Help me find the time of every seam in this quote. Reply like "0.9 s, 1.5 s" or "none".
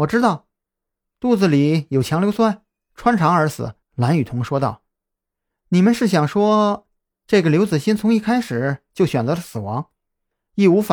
3.8 s